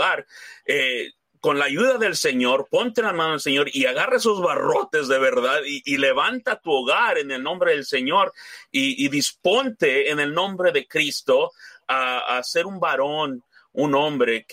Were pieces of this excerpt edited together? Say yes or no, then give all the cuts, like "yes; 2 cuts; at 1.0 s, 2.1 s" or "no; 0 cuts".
no; 0 cuts